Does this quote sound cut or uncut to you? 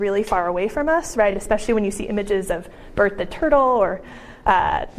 uncut